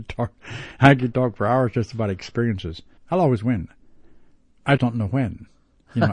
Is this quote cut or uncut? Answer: cut